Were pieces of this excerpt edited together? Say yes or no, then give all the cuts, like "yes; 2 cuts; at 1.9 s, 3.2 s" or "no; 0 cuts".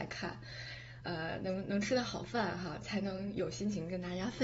yes; 1 cut; at 1.0 s